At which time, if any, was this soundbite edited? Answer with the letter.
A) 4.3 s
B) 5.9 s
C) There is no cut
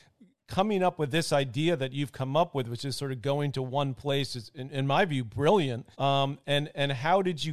B